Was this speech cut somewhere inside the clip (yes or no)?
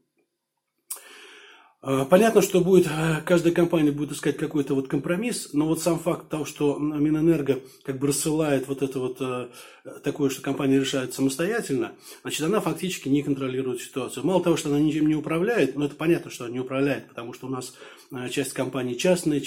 no